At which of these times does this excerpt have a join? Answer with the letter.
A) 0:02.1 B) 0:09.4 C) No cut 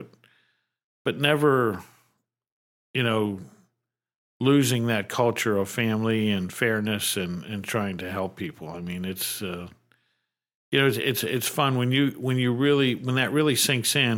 C